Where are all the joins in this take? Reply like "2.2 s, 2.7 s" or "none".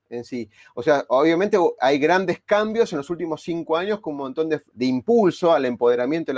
4.7 s